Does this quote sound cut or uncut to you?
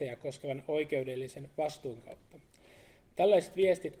uncut